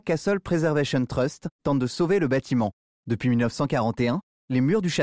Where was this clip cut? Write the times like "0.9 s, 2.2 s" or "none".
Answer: 1.6 s, 2.9 s